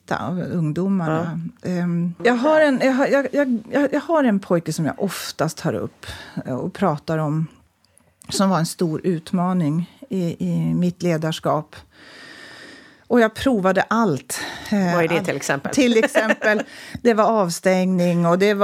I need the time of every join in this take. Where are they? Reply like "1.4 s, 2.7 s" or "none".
2.2 s